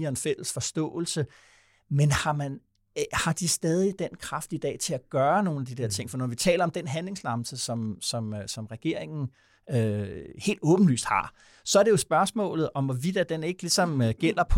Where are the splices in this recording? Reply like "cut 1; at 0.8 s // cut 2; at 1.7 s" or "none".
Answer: none